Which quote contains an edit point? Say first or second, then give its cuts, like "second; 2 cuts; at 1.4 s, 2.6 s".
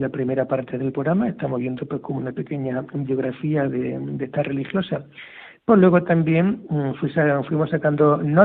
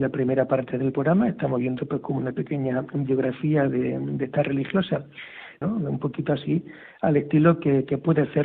second; 1 cut; at 5.6 s